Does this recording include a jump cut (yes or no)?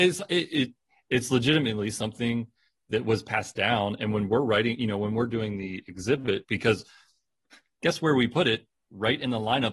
no